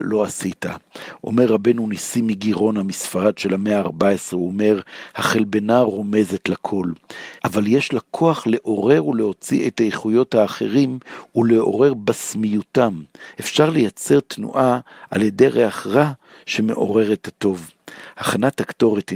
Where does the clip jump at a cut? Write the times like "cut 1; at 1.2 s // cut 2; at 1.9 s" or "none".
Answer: cut 1; at 7.4 s // cut 2; at 13.3 s